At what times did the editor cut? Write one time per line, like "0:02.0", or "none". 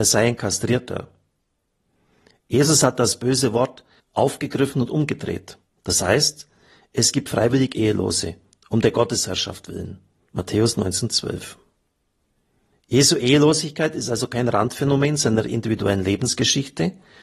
0:04.0
0:05.8
0:10.2